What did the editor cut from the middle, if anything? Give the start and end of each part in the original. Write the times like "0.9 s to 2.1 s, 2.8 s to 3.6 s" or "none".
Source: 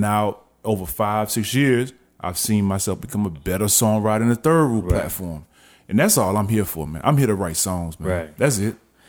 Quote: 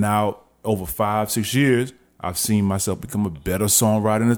none